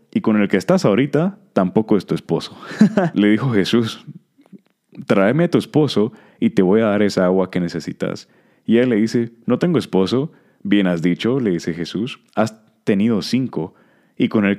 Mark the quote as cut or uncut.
cut